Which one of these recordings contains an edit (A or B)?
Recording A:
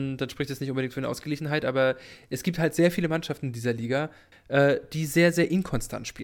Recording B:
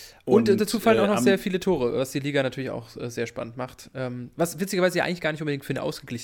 A